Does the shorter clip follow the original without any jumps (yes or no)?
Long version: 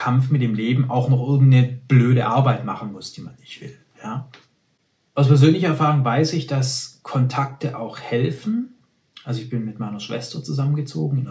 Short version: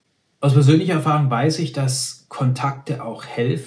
yes